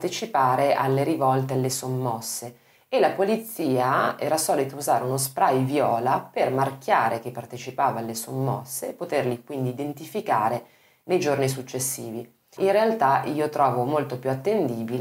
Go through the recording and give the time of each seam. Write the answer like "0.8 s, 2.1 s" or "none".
12.6 s